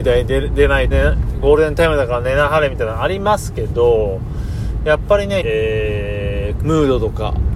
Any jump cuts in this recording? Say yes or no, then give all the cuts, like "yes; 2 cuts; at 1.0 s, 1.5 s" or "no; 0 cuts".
yes; 3 cuts; at 0.9 s, 5.4 s, 6.6 s